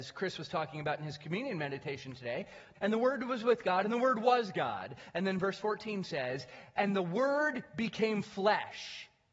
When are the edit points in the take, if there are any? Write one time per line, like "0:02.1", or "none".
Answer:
0:02.8